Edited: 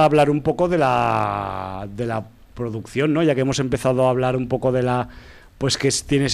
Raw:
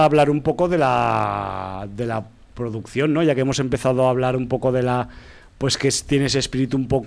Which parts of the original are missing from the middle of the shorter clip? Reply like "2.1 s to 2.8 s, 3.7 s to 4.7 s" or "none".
none